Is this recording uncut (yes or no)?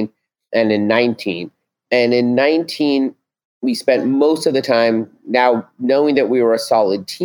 yes